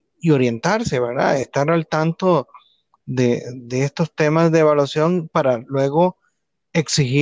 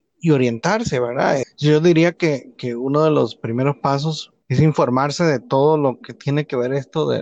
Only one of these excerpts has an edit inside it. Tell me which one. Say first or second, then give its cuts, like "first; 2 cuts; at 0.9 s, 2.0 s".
second; 2 cuts; at 1.4 s, 4.4 s